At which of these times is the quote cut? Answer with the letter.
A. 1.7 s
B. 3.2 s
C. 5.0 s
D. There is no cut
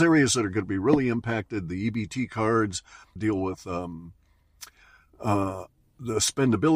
B